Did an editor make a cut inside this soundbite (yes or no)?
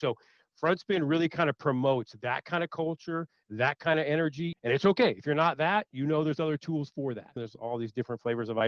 yes